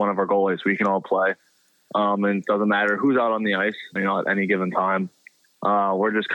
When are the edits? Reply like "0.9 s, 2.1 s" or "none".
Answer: 4.0 s